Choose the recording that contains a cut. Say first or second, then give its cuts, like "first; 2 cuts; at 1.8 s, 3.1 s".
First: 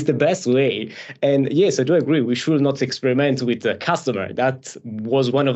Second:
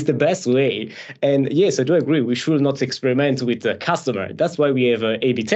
first; 1 cut; at 4.3 s